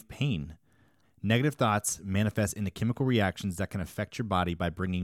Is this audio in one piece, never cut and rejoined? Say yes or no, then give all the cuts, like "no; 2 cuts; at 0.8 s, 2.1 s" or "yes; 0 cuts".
no; 1 cut; at 1.0 s